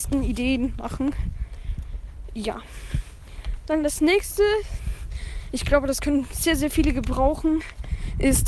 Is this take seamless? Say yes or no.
yes